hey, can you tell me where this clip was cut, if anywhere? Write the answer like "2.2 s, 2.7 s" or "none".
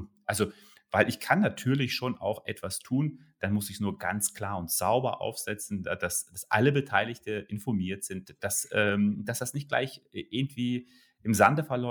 none